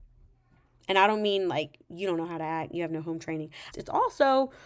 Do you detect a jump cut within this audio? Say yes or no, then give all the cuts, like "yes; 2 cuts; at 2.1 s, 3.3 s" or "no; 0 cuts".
yes; 1 cut; at 3.7 s